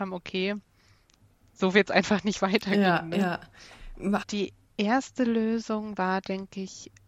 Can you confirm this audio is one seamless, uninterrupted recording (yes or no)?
no